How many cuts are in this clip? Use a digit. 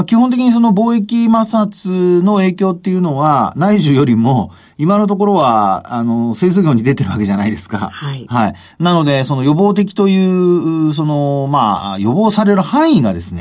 0